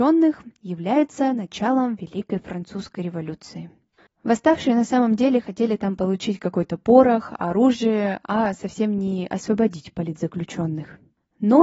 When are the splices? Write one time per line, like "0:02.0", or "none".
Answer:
0:04.1